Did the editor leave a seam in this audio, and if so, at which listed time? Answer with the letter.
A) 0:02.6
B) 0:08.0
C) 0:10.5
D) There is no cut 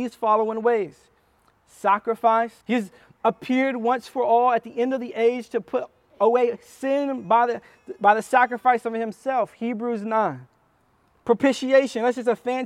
A